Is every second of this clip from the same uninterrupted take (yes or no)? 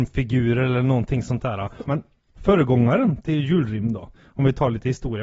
no